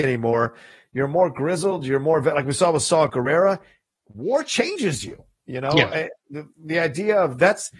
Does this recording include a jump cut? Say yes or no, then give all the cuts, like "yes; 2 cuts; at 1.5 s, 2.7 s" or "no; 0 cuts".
no; 0 cuts